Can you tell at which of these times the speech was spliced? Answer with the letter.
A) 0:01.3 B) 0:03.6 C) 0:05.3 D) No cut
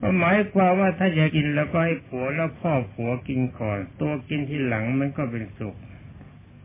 A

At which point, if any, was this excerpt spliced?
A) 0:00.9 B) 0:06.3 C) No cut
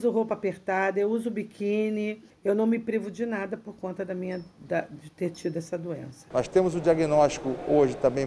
B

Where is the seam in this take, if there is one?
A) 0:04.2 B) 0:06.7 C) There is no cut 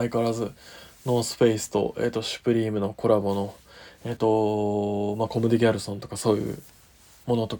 A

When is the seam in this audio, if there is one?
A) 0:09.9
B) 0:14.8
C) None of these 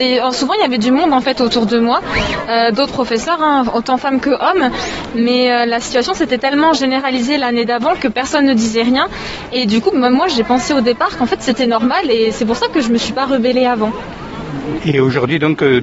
B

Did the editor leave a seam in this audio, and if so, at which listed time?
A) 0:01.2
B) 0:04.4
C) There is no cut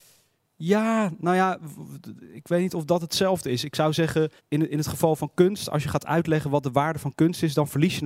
B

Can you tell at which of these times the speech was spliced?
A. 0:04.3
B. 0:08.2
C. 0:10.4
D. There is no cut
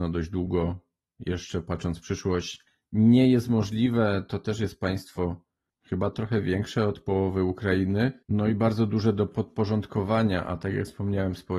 B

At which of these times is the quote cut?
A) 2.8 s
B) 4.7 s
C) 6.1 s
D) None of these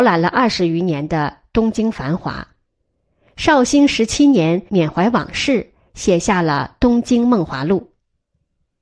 B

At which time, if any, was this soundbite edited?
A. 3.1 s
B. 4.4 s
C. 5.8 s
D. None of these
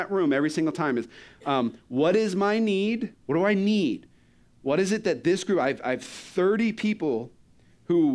A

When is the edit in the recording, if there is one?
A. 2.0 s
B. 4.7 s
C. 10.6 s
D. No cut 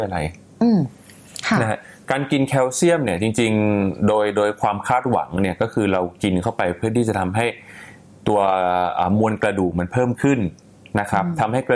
D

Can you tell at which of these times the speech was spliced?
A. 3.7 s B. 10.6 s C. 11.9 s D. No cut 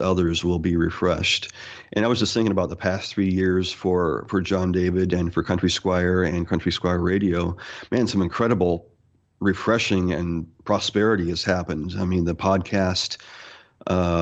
B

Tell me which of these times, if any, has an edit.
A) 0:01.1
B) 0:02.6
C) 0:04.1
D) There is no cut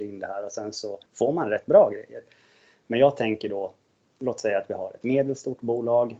A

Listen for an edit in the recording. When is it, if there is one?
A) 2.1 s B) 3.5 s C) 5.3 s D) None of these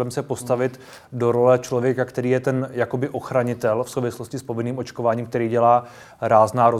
D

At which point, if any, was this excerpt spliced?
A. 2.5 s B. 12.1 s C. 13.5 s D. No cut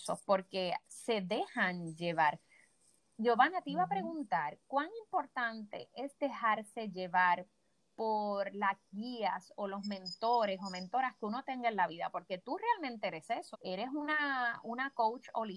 C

